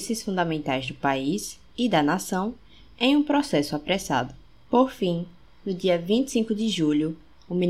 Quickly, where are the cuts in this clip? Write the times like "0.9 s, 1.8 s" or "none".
4.6 s